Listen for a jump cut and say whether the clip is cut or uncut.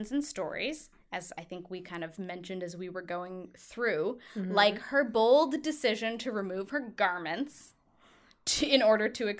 uncut